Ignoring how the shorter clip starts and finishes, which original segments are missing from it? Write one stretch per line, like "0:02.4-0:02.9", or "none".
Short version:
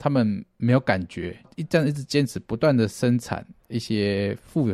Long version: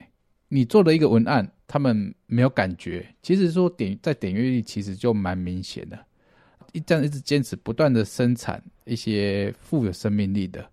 0:03.1-0:06.6